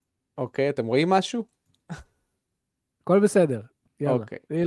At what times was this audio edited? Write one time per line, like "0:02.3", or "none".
none